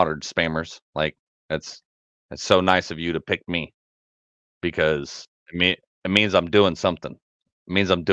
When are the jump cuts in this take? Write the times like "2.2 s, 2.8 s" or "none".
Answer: 5.9 s